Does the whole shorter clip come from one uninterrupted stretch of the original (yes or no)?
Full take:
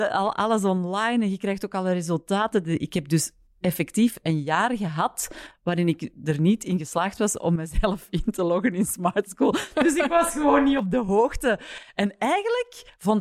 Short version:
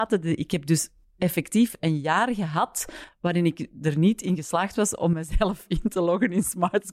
yes